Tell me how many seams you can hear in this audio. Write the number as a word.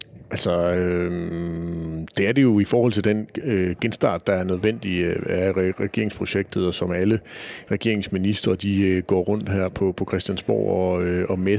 zero